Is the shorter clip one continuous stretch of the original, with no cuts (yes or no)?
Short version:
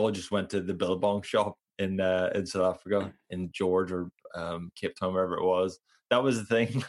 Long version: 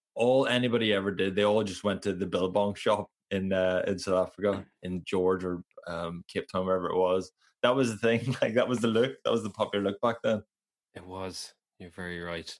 yes